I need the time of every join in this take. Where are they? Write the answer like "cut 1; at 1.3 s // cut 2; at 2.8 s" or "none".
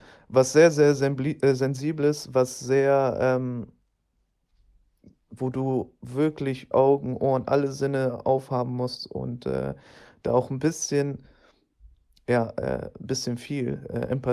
cut 1; at 6.7 s